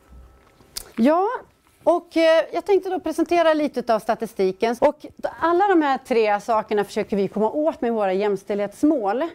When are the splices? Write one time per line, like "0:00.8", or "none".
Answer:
0:00.9
0:04.8